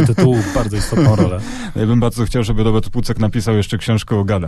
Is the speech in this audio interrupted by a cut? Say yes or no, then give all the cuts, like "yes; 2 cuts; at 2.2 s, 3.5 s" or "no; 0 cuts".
no; 0 cuts